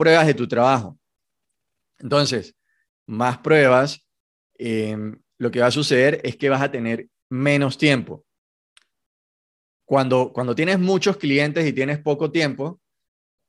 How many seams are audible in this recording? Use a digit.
1